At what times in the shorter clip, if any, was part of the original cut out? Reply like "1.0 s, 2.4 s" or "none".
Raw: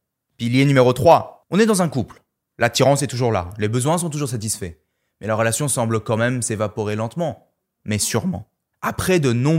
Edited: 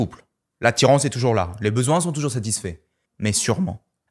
3.0 s